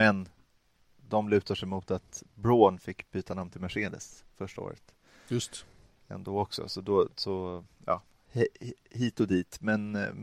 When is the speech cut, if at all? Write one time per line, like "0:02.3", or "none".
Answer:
none